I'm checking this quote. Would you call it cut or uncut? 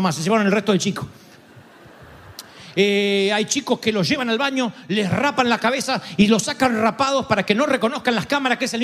uncut